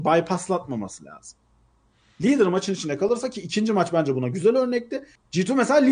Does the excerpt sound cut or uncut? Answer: uncut